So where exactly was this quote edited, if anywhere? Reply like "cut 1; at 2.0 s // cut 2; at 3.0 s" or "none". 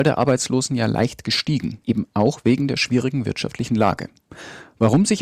cut 1; at 1.8 s